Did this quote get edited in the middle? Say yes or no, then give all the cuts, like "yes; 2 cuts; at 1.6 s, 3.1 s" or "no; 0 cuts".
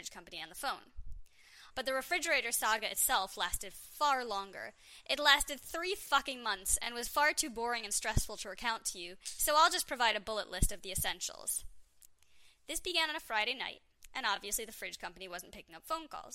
yes; 1 cut; at 1.7 s